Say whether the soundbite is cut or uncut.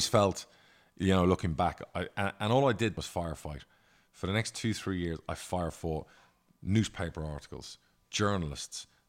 cut